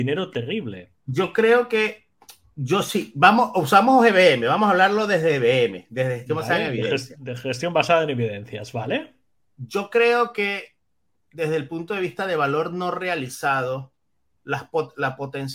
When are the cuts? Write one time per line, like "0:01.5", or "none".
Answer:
none